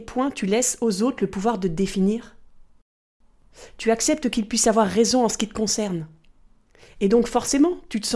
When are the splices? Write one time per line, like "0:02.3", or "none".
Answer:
none